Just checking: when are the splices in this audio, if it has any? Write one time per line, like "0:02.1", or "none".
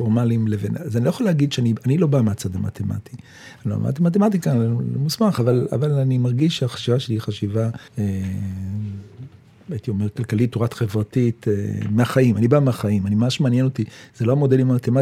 0:07.9